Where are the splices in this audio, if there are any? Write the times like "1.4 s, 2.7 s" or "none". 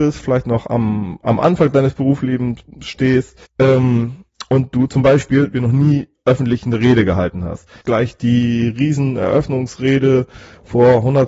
3.5 s, 5.5 s, 7.8 s

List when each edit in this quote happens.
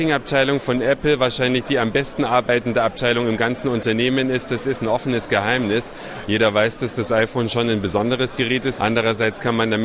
6.2 s, 8.8 s

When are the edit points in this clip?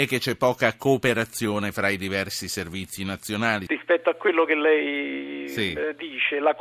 3.7 s

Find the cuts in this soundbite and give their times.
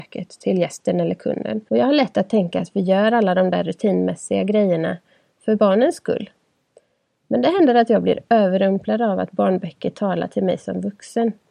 1.7 s

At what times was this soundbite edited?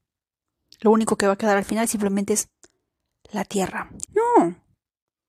4.1 s

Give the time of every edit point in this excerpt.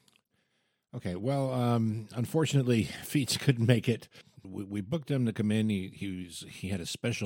4.4 s

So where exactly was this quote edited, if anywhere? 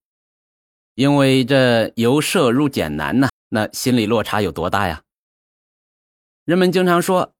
3.3 s

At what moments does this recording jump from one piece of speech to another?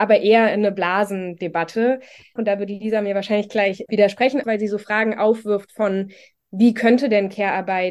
2.4 s, 4.4 s

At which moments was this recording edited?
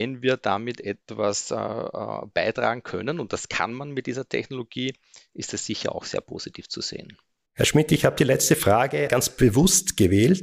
7.5 s, 9.1 s

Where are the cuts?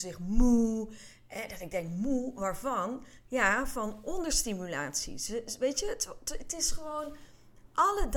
none

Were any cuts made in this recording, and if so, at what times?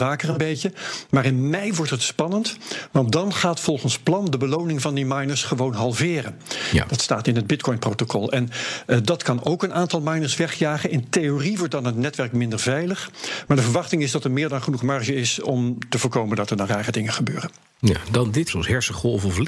18.5 s

